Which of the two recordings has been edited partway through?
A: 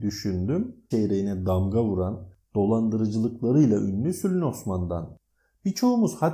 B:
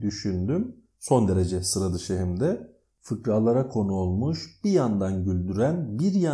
A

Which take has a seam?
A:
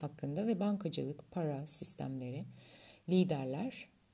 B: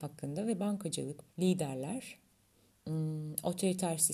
B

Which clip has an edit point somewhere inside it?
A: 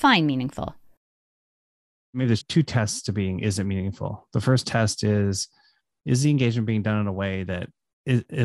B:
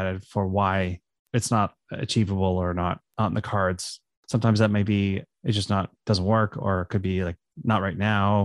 A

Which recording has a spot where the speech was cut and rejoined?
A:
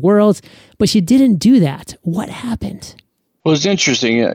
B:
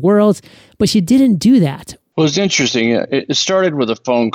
B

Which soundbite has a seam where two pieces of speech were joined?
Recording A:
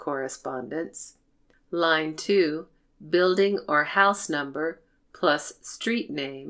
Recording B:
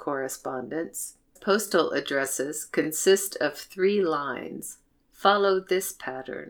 B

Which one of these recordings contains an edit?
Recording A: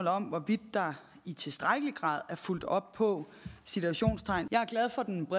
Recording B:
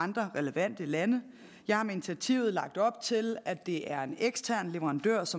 A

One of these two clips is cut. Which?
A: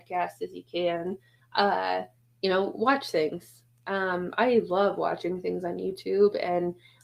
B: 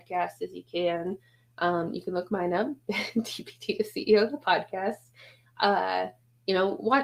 A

